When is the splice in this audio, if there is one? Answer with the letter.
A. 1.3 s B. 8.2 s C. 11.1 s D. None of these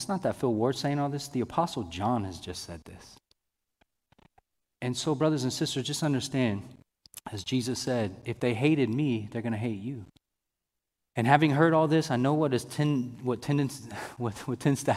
C